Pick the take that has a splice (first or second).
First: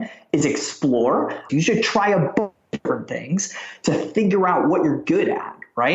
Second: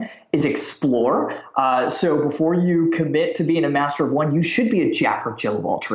first